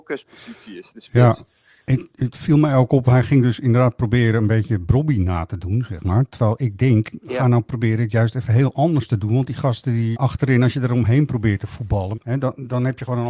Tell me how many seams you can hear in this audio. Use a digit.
2